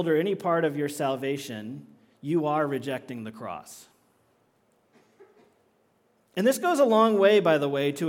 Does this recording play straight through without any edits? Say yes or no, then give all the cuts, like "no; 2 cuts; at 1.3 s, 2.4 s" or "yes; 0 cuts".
no; 1 cut; at 4.4 s